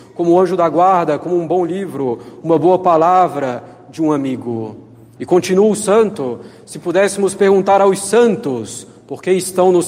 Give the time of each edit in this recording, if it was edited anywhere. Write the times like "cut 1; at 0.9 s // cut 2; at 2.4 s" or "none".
cut 1; at 5.2 s

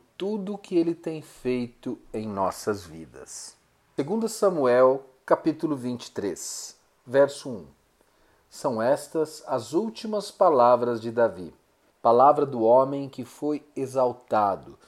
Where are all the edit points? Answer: cut 1; at 11.9 s

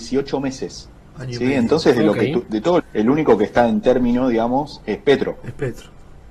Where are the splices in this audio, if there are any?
cut 1; at 2.8 s

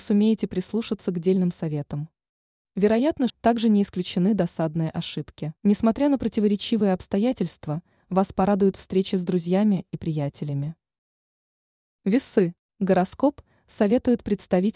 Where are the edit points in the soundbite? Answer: cut 1; at 3.3 s // cut 2; at 5.6 s

